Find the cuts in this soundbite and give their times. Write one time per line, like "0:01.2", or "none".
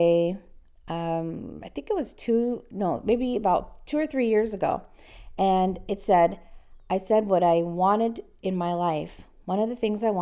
none